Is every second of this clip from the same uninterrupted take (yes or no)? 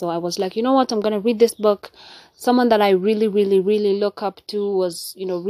yes